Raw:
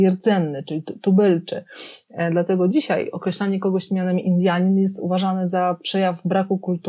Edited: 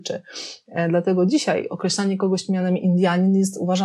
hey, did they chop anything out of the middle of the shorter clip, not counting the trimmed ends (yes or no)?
no